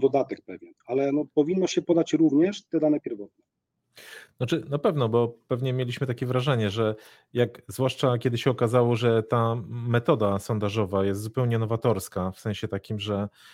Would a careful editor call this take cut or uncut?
uncut